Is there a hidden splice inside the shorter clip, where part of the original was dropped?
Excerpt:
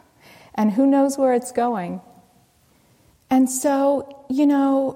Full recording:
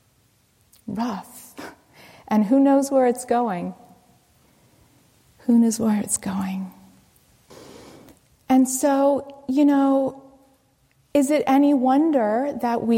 yes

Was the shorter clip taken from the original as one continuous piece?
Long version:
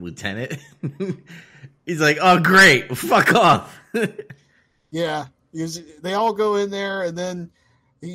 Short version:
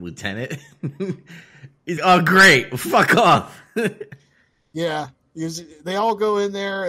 no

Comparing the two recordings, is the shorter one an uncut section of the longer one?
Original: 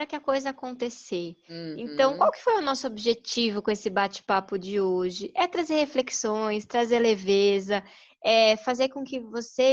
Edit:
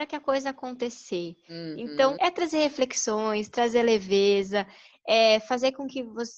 no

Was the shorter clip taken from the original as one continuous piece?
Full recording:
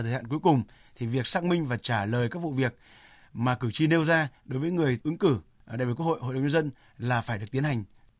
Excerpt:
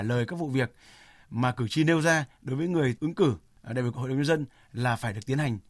no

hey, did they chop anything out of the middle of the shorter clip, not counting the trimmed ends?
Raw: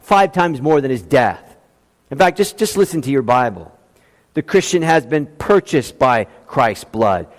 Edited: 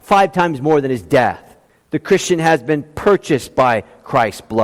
yes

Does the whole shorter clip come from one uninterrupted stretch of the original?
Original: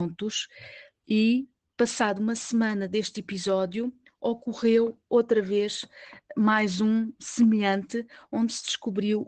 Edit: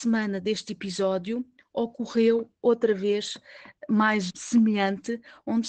no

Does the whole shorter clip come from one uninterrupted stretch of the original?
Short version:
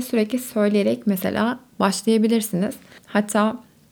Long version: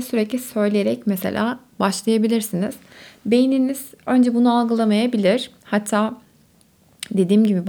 no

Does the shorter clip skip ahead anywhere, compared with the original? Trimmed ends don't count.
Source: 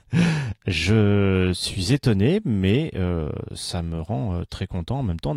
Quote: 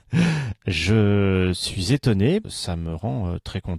yes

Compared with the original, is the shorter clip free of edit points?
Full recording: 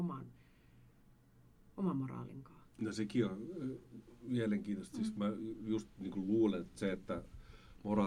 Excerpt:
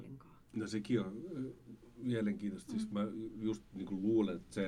yes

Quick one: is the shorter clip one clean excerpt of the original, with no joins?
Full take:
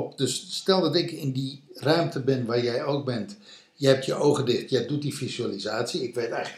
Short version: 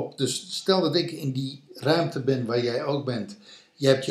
yes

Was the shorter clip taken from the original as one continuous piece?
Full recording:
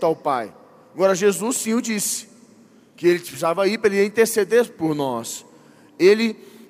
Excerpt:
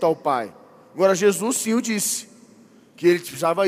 yes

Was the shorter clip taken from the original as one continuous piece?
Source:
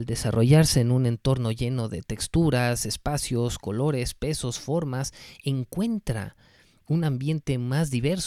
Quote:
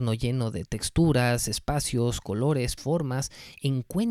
no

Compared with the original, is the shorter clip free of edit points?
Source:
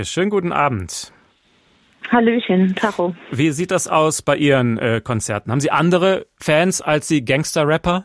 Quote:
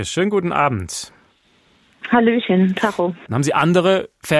no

